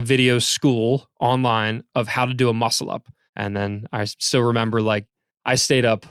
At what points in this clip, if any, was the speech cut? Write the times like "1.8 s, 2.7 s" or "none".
3.3 s